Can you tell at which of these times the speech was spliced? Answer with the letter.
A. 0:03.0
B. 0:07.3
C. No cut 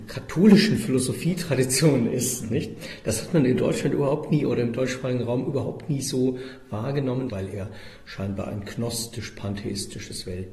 B